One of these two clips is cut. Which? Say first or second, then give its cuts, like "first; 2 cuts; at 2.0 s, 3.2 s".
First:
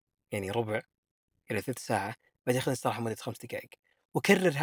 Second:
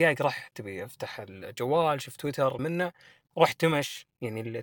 second; 1 cut; at 2.6 s